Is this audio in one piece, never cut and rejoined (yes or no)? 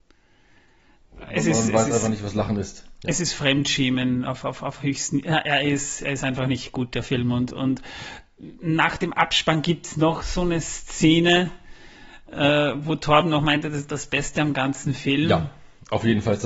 yes